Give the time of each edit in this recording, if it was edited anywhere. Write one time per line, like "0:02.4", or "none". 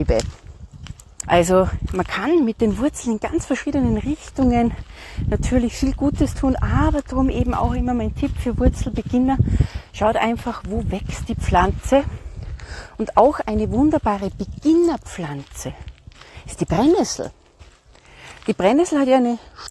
0:01.2